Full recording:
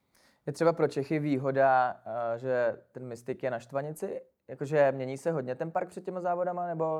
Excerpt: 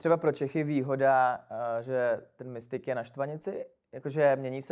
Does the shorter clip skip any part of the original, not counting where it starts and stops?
no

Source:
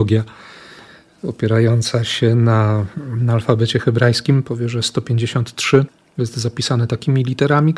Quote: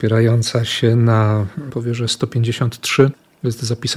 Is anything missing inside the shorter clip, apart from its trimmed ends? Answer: yes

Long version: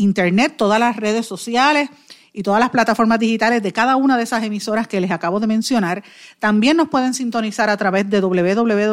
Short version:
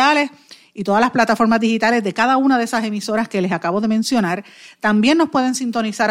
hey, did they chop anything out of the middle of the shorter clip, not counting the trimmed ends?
no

